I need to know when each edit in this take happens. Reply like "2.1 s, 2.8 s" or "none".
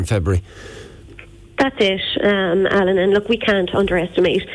none